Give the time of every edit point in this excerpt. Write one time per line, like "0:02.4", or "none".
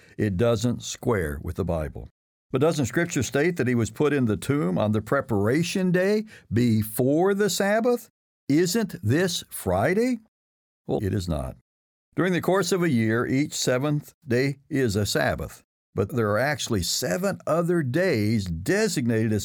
0:11.0

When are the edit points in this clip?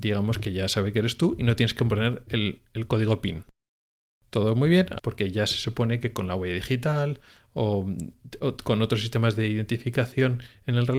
0:05.0

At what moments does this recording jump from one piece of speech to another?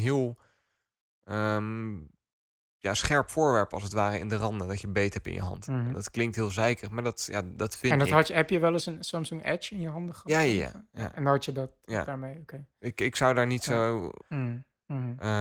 0:14.2

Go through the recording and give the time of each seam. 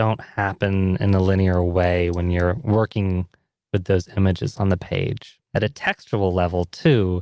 0:05.5

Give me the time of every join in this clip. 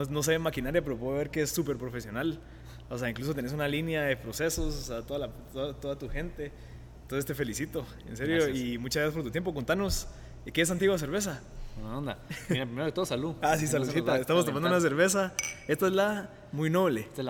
none

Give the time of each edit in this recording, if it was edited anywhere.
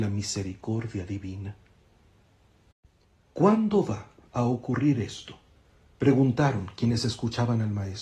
none

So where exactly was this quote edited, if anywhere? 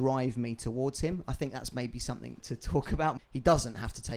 0:03.2

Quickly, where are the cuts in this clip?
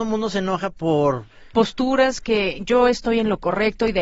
0:01.5

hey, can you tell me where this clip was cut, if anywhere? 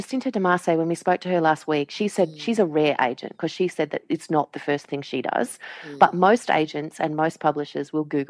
none

